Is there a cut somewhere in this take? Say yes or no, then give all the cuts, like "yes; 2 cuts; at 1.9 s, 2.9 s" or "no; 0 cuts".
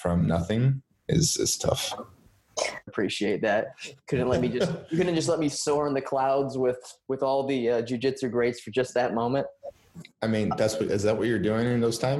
yes; 1 cut; at 2.9 s